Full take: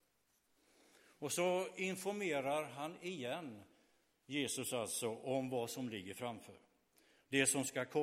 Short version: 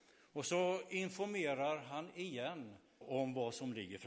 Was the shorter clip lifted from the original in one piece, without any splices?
no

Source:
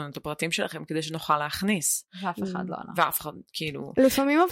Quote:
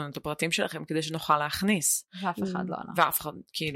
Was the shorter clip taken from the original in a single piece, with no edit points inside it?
yes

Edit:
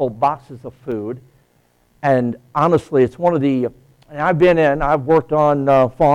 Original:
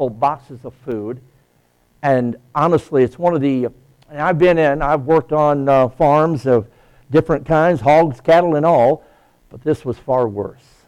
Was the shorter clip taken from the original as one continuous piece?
yes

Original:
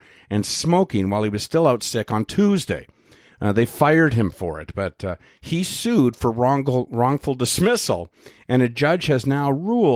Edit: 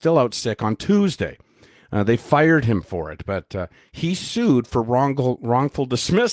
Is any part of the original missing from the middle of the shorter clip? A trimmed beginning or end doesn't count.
no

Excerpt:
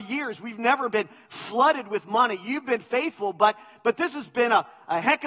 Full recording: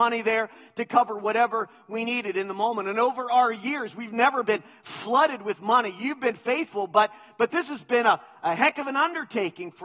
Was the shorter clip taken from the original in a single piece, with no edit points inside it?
yes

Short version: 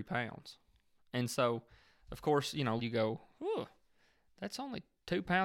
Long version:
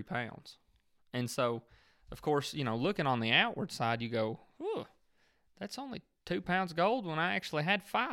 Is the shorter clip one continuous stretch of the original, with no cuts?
no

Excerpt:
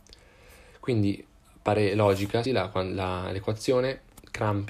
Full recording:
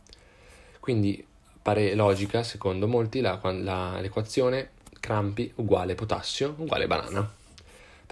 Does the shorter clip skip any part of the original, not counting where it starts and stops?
yes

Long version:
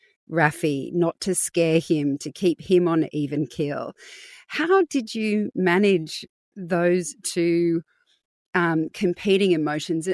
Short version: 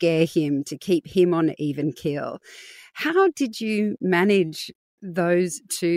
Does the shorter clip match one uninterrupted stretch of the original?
yes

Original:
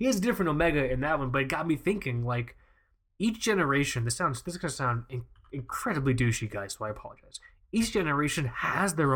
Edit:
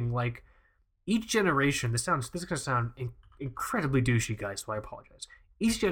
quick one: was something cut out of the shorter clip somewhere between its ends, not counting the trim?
no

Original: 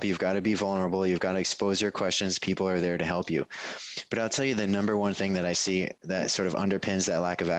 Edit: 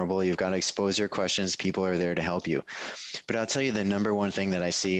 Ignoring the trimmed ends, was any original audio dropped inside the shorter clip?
no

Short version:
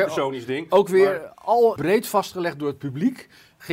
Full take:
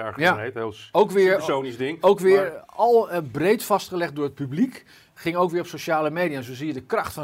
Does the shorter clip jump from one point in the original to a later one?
yes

